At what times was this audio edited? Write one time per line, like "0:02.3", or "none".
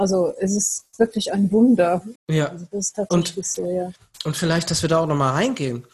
0:02.2